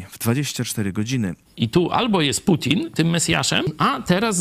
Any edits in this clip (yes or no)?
yes